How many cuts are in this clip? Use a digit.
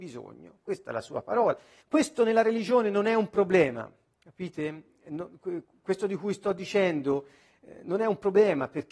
1